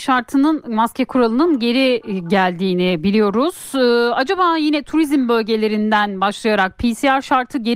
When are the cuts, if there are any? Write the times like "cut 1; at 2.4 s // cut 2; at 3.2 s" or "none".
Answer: none